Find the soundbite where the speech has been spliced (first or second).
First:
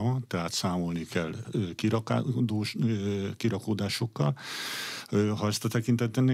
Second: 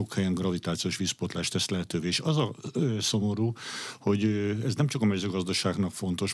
first